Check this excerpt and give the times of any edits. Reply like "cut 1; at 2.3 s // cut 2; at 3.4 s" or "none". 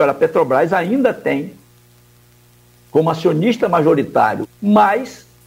cut 1; at 4.4 s

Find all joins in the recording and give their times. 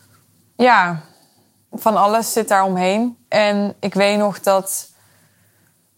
cut 1; at 3.2 s

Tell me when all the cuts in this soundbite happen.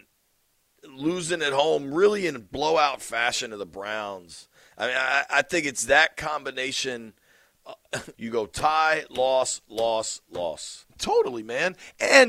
cut 1; at 8.1 s // cut 2; at 10.8 s

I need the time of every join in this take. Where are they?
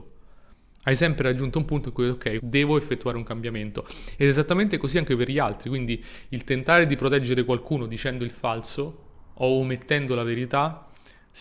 cut 1; at 2.4 s

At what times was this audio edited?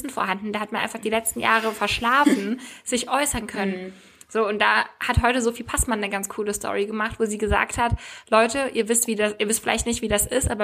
none

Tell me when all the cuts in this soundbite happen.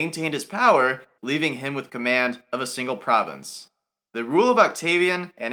cut 1; at 1.2 s

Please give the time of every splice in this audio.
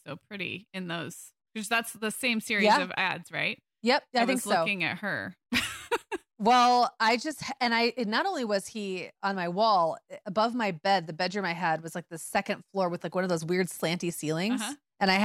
cut 1; at 9.1 s // cut 2; at 10.2 s

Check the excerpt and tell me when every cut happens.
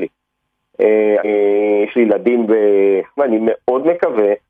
cut 1; at 1.2 s // cut 2; at 3.2 s

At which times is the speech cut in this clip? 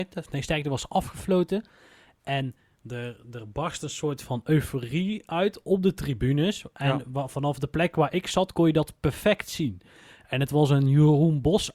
none

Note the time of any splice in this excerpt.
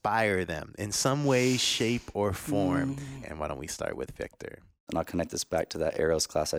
cut 1; at 3.2 s // cut 2; at 4.9 s

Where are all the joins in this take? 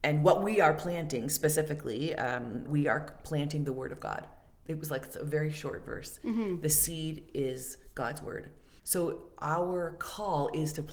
cut 1; at 2.7 s // cut 2; at 8.8 s

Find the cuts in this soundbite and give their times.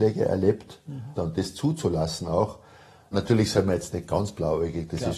cut 1; at 1.2 s // cut 2; at 3.1 s

